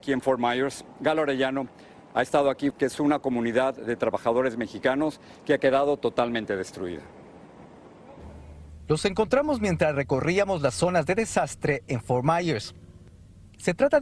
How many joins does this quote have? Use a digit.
1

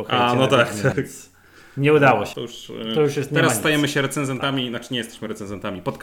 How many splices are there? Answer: 2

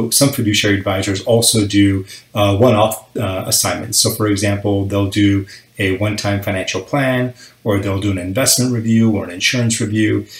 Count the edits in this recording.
0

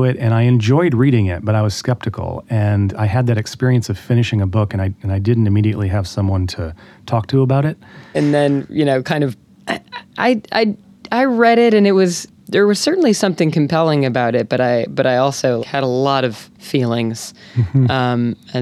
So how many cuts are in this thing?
2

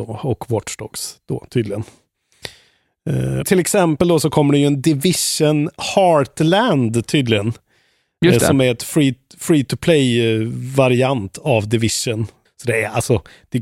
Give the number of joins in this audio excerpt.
2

